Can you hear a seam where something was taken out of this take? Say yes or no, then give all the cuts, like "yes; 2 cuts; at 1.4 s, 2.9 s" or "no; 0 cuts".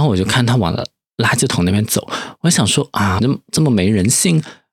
yes; 1 cut; at 3.2 s